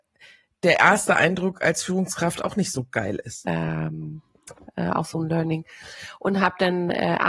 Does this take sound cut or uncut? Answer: cut